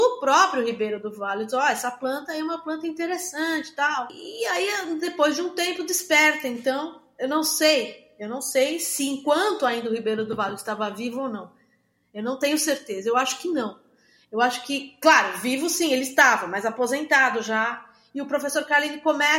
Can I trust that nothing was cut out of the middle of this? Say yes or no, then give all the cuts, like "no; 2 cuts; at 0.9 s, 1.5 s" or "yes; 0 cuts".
yes; 0 cuts